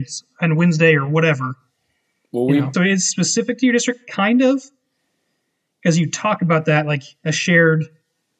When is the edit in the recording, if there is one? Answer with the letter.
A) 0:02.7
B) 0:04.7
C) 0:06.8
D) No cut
A